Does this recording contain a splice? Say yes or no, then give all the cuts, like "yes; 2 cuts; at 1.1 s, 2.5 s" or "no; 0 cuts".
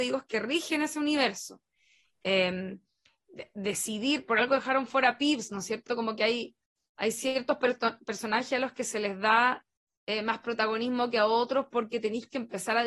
no; 0 cuts